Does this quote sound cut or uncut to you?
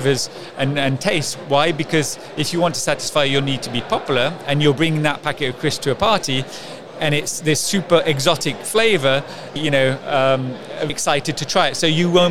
cut